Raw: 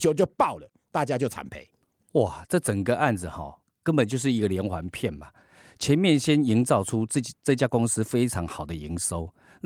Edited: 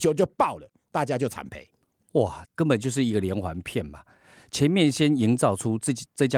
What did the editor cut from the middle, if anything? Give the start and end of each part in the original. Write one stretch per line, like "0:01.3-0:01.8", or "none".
0:02.5-0:03.7